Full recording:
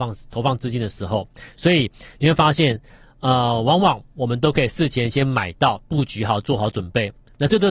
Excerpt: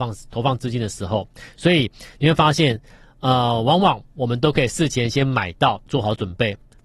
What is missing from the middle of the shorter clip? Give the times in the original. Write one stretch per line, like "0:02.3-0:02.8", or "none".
0:05.9-0:06.4